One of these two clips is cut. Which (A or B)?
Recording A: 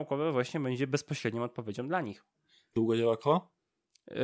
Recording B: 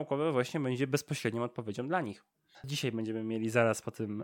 B